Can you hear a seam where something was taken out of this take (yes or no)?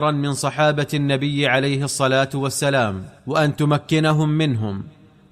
yes